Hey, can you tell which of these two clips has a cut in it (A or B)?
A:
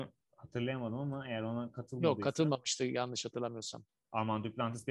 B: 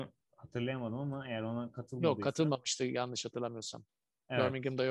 A